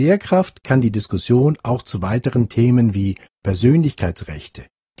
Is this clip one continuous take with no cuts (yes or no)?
yes